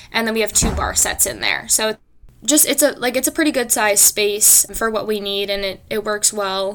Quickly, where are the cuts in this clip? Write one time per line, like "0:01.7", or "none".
0:04.7